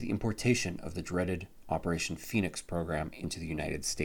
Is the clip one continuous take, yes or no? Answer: yes